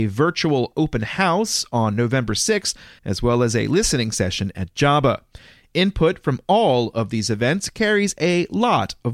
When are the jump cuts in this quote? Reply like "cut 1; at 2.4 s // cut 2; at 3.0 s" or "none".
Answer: cut 1; at 3.0 s